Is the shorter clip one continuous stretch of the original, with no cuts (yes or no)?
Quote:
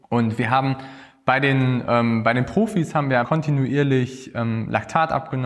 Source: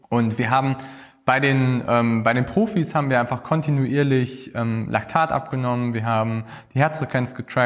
no